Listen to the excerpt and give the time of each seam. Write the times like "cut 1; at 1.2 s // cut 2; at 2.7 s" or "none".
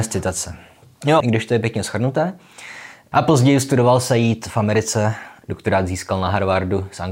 cut 1; at 1.2 s // cut 2; at 3.1 s // cut 3; at 5.4 s

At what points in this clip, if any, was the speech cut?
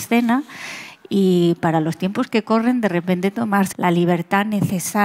cut 1; at 3.7 s

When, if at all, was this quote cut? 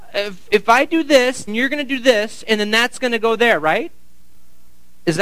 cut 1; at 1.5 s

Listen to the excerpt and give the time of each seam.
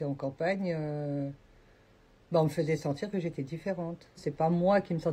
cut 1; at 4.2 s

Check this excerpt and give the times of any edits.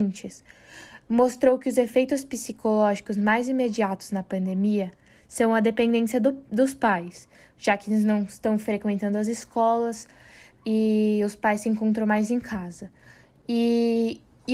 none

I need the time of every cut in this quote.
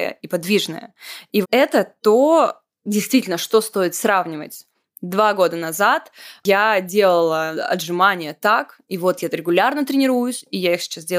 cut 1; at 1.4 s

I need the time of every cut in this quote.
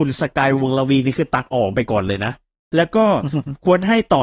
none

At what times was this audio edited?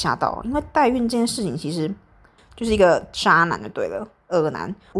cut 1; at 2.4 s

